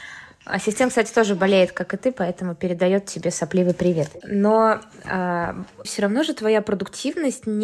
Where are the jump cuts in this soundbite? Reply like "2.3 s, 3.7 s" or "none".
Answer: 4.2 s, 5.8 s